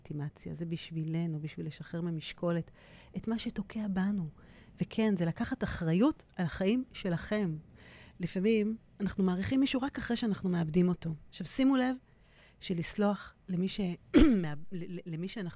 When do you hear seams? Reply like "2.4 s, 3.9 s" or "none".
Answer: 8.1 s